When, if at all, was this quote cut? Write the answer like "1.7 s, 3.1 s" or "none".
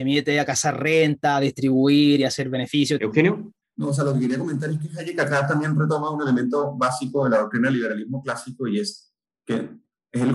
3.0 s